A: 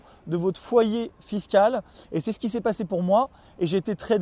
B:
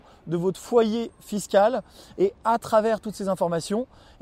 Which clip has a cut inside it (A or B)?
A